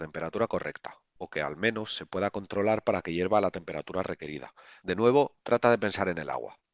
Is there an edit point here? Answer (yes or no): yes